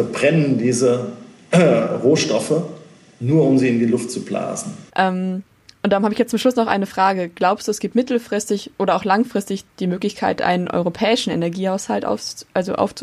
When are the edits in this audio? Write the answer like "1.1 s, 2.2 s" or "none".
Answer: 4.9 s